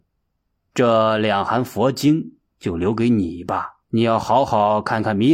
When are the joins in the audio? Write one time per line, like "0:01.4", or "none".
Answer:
0:03.8